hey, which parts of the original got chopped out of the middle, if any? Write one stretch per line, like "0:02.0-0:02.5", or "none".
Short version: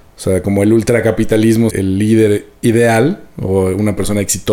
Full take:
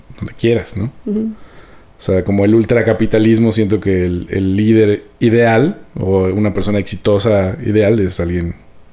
0:03.5-0:04.3